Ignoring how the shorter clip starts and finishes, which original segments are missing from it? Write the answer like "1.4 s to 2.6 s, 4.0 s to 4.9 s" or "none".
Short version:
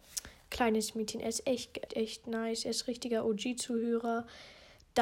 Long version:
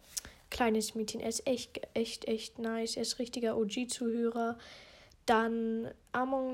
1.9 s to 2.2 s